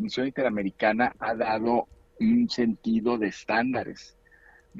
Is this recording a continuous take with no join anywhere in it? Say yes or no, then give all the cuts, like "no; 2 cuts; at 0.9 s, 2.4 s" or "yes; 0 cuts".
yes; 0 cuts